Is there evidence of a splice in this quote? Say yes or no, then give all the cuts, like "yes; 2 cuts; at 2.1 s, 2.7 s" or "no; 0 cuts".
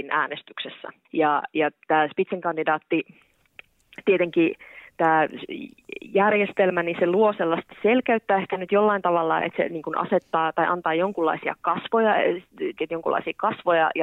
yes; 3 cuts; at 1.0 s, 9.4 s, 12.8 s